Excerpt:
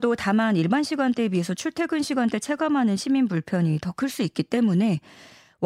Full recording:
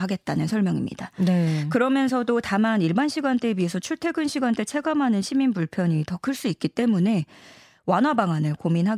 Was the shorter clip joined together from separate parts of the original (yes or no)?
no